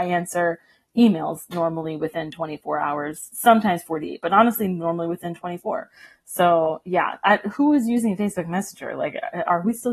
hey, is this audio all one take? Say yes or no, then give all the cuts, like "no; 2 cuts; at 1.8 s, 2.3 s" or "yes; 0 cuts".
yes; 0 cuts